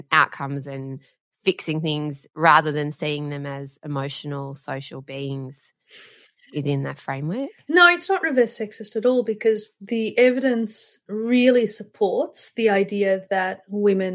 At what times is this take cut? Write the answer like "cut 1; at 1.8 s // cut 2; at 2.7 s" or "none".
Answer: none